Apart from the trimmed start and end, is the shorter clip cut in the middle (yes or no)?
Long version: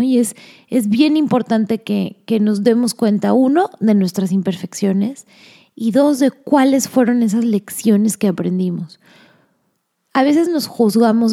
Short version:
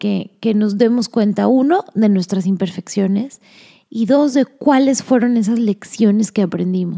no